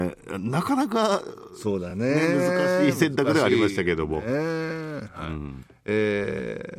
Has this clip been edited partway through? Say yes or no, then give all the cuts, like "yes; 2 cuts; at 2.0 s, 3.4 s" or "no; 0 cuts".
no; 0 cuts